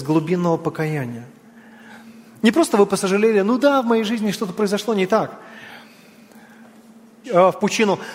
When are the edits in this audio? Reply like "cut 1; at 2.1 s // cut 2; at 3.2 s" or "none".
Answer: cut 1; at 7.2 s